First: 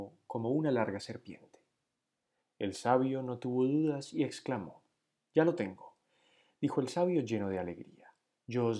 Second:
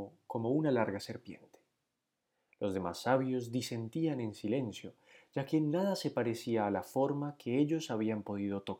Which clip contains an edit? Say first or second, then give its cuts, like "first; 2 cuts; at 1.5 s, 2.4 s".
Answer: first; 1 cut; at 2.4 s